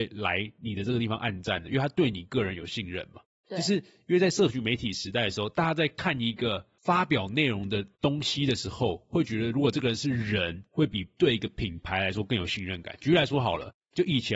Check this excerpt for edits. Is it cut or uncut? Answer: uncut